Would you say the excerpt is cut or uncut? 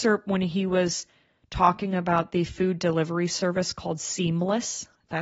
uncut